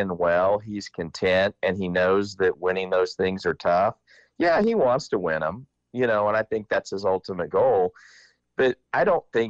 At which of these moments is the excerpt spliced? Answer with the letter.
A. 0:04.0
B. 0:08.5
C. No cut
C